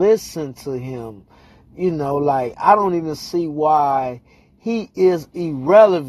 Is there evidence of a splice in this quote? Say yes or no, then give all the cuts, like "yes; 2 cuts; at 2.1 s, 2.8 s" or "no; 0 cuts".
no; 0 cuts